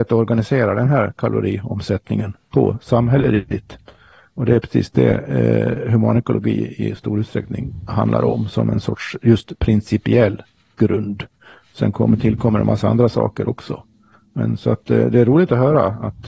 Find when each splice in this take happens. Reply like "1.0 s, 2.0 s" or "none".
none